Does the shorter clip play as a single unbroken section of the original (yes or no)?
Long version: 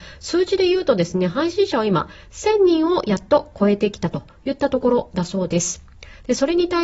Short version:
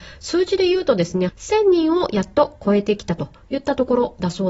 no